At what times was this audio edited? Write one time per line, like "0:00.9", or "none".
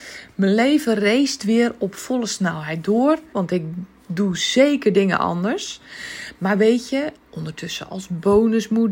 0:03.3
0:07.2